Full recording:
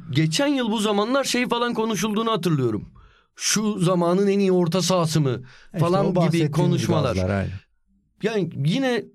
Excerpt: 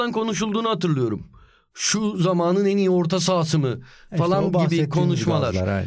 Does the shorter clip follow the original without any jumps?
yes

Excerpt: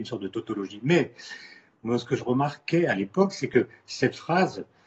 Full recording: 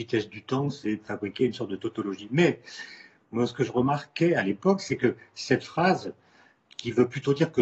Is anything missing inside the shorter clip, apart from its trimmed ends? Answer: no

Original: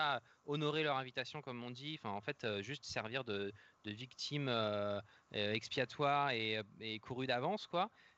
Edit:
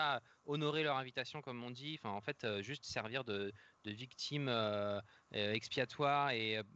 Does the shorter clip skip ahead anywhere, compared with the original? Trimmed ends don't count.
no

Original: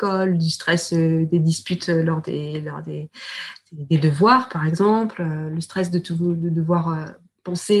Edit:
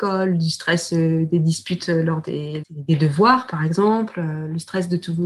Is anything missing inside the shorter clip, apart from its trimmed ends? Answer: yes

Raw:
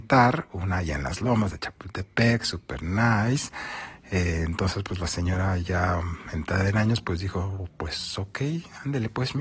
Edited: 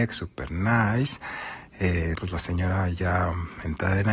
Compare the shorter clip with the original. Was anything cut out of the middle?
yes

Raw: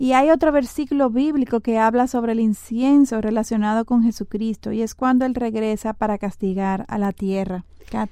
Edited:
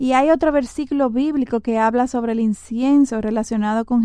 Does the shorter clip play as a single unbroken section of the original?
yes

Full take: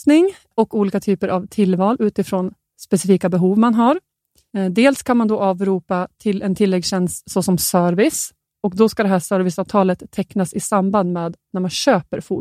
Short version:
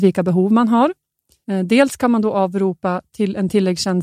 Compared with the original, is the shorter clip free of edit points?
yes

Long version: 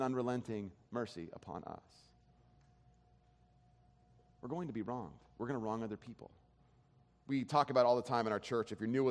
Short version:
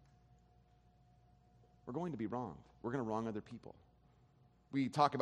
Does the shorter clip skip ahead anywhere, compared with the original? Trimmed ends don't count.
no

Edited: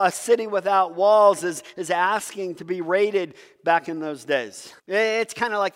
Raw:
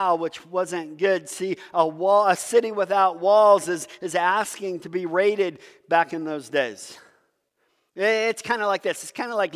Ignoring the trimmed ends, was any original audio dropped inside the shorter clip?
yes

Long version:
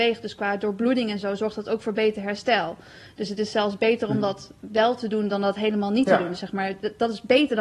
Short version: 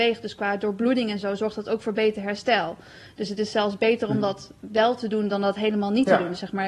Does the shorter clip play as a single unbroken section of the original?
yes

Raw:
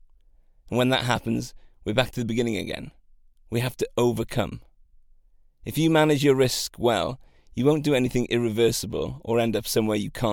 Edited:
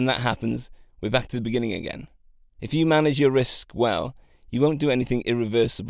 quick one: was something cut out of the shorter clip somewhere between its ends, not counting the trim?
yes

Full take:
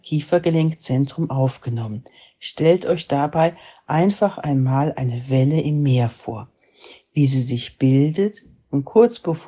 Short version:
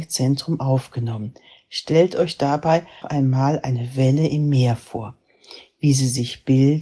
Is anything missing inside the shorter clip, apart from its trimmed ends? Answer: yes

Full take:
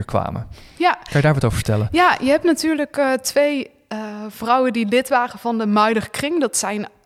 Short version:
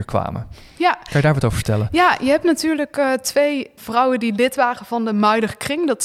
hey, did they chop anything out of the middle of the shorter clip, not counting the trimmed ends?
yes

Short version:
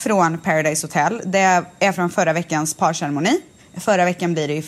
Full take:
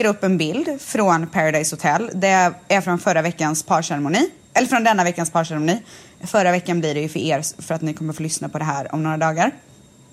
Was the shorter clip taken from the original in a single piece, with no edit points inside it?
no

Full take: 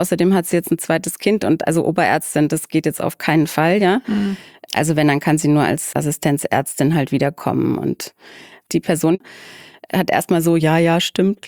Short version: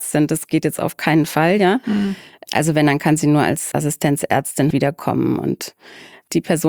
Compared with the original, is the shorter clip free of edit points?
no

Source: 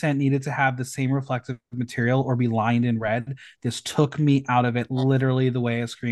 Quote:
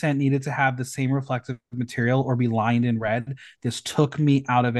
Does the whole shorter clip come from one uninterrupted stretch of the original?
yes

